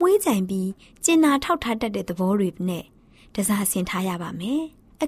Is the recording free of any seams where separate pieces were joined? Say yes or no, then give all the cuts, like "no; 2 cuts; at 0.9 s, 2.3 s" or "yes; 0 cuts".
yes; 0 cuts